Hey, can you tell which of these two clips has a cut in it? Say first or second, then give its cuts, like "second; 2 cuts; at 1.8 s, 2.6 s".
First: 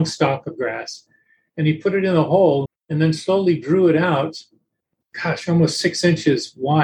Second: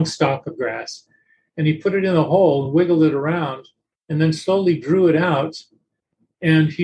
first; 2 cuts; at 2.6 s, 5.0 s